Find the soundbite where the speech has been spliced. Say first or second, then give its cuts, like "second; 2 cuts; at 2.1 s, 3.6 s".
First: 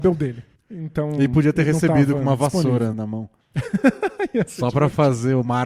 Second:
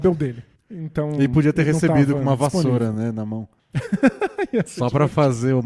first; 1 cut; at 2.9 s